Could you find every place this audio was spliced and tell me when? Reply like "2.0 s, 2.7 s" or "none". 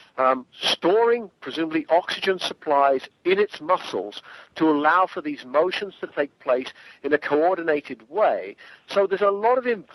none